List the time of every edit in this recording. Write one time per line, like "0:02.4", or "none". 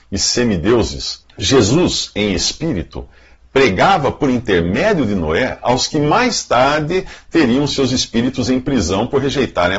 0:01.2

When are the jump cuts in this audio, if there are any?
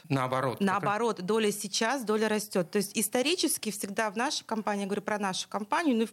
none

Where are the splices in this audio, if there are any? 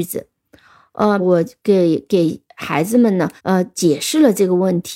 0:01.2
0:03.4

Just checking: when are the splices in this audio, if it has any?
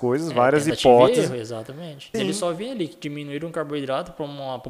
0:02.1

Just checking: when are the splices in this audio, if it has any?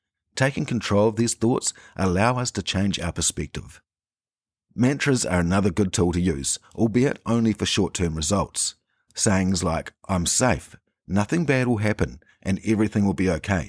none

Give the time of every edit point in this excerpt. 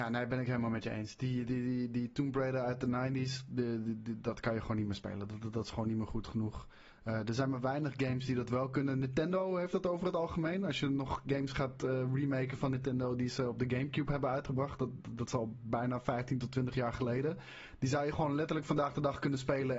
none

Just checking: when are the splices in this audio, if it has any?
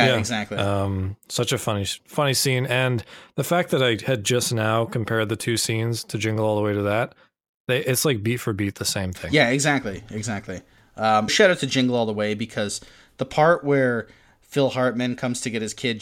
0:02.0
0:11.3

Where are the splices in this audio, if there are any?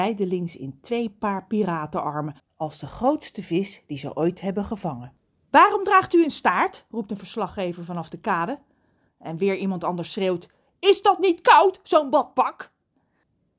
0:09.1

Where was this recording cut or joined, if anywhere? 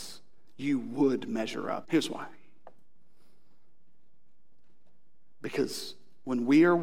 0:01.8

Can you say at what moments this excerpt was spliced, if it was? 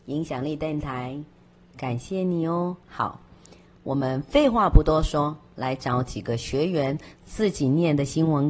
0:02.8

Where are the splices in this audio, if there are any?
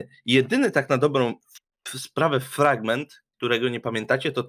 none

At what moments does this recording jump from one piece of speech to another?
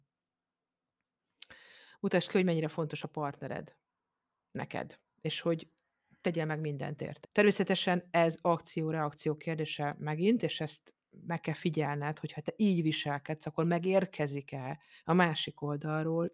0:07.2

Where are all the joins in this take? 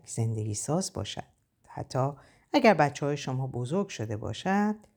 0:01.6

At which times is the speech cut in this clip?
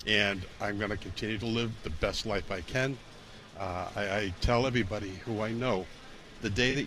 none

